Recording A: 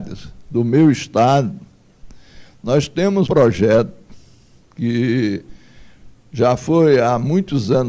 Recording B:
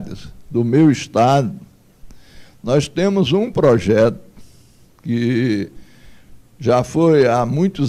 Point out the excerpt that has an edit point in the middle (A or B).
A